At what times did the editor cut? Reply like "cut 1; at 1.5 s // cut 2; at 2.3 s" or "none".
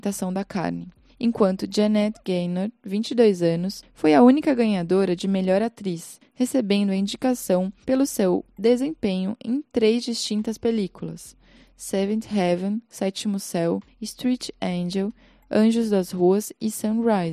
none